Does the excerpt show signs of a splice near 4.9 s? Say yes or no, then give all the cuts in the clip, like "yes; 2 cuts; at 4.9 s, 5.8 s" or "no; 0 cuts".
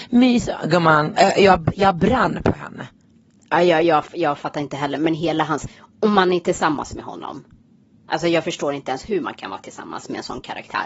no; 1 cut; at 1.2 s